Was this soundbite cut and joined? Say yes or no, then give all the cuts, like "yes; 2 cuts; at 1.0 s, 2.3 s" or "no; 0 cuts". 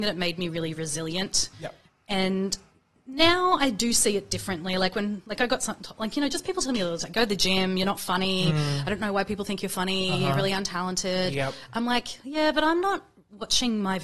no; 0 cuts